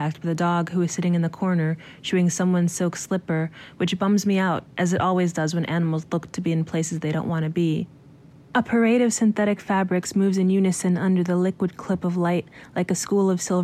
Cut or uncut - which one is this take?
uncut